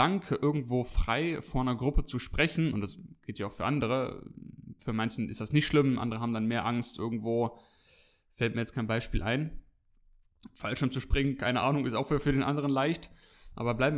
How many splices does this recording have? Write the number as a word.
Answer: zero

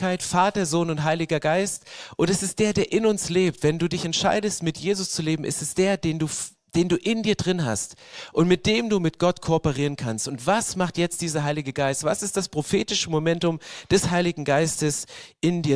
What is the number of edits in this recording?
zero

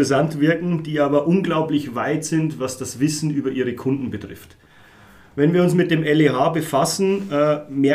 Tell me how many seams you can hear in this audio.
zero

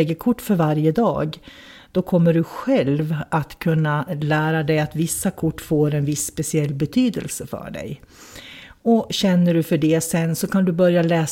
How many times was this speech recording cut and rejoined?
zero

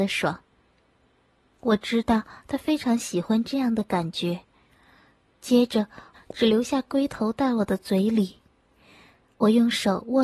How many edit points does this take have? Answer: two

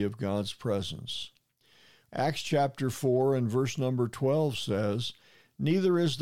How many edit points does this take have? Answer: one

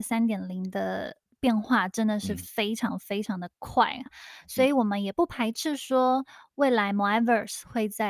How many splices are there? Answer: one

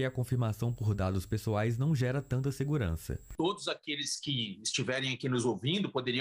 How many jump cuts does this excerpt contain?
zero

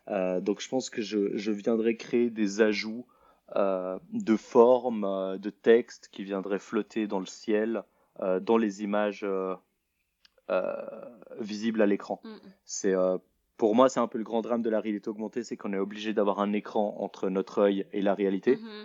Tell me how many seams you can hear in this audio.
zero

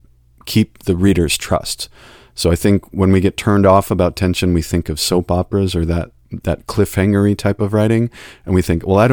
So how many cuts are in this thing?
zero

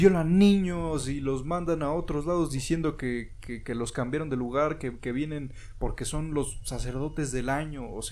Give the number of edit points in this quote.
zero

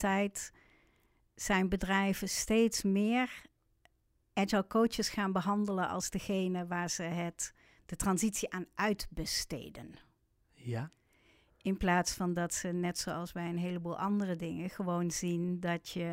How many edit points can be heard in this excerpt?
zero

